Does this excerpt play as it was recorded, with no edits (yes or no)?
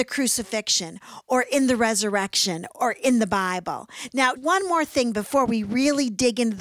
no